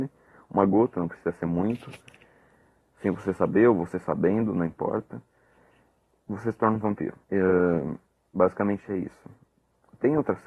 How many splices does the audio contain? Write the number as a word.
one